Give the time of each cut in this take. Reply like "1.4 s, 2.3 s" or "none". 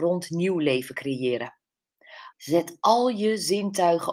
2.3 s